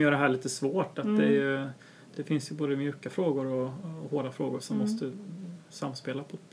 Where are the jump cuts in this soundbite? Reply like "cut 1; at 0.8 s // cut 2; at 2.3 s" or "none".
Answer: none